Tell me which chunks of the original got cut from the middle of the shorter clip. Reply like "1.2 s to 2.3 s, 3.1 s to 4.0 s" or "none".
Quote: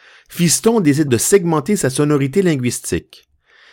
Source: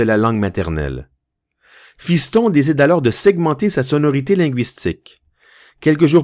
2.8 s to 3.0 s